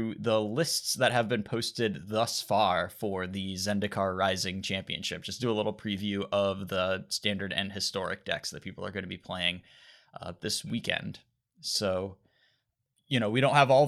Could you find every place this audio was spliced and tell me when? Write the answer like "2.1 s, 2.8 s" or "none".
none